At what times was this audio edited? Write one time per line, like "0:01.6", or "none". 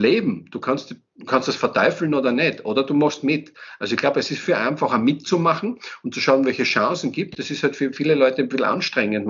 none